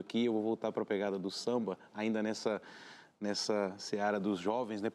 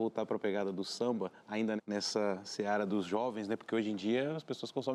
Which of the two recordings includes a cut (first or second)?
second